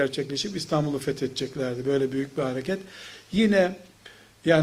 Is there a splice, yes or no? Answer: no